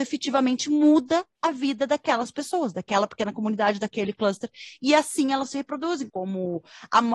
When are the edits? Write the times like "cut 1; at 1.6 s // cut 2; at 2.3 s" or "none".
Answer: cut 1; at 6.1 s